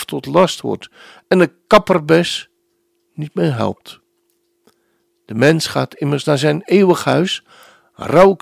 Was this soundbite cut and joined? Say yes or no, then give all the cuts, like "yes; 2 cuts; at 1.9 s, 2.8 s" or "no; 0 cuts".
no; 0 cuts